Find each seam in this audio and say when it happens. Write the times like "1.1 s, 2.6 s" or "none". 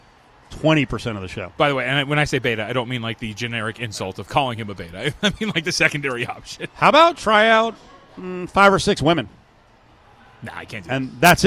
none